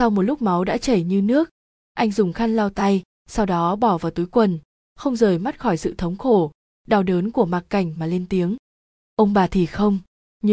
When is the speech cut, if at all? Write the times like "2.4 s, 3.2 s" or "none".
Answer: none